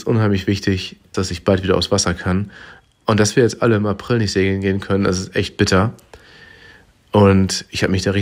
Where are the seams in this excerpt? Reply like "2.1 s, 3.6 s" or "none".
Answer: 1.1 s